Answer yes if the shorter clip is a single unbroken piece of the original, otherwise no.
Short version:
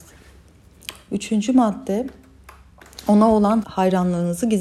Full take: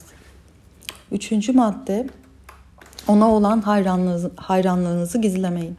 no